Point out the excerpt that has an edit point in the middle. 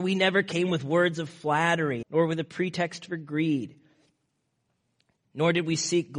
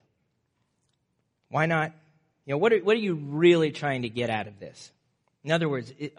first; 1 cut; at 2.0 s

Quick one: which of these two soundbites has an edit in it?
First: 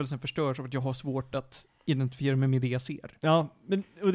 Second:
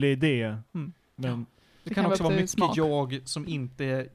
second; 1 cut; at 1.2 s

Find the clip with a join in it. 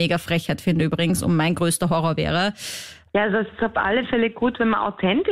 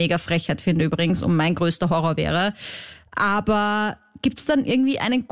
first; 1 cut; at 3.1 s

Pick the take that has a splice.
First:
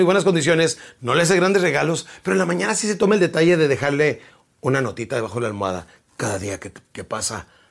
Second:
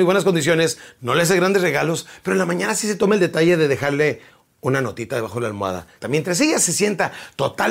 second; 1 cut; at 6.0 s

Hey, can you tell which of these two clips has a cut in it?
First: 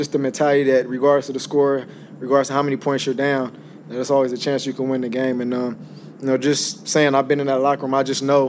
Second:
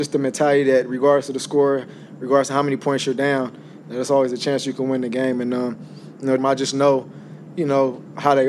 second; 1 cut; at 6.4 s

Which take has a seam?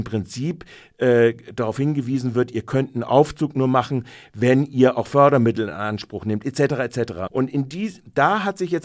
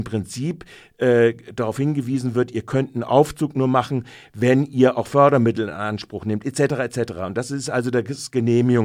first; 1 cut; at 7.3 s

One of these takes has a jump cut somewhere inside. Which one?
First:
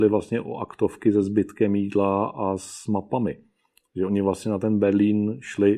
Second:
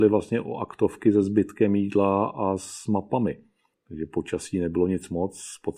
second; 1 cut; at 3.7 s

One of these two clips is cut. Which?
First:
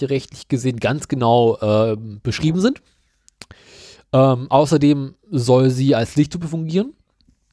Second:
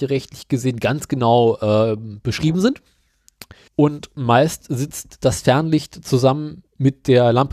second; 1 cut; at 3.7 s

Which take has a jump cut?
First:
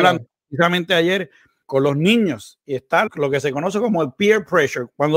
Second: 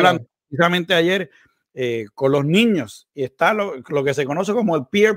first; 2 cuts; at 1.6 s, 3.1 s

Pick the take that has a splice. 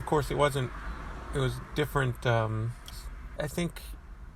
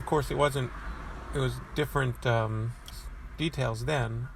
first; 1 cut; at 3.4 s

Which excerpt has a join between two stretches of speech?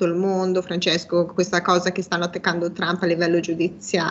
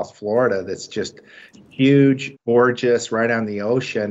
second; 1 cut; at 2.4 s

